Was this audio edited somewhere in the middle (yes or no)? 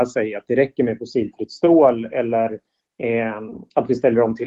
no